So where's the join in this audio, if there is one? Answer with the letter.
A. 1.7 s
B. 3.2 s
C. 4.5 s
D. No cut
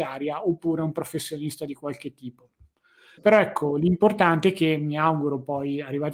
B